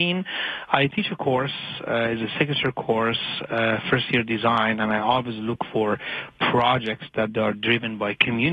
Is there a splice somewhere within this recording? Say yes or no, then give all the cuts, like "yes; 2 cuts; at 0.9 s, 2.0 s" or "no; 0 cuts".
no; 0 cuts